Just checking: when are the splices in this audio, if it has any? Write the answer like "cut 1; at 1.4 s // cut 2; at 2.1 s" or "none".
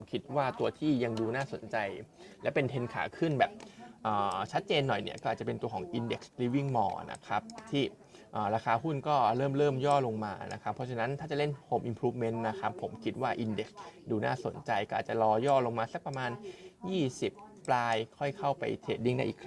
cut 1; at 17.6 s